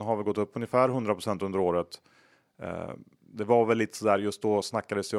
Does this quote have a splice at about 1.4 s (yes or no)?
no